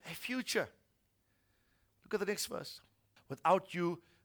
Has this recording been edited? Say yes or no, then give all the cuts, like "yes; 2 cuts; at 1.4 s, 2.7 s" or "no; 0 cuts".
yes; 1 cut; at 3.2 s